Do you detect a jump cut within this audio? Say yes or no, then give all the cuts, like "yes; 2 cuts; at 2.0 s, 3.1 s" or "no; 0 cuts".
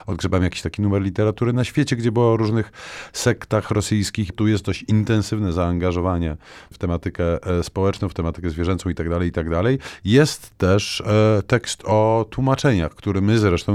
yes; 1 cut; at 4.3 s